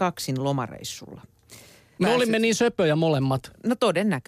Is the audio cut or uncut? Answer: cut